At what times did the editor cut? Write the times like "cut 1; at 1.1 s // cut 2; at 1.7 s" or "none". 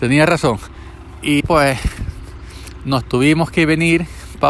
cut 1; at 1.4 s